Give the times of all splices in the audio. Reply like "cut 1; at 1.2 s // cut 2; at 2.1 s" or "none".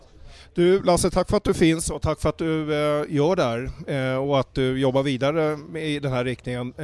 none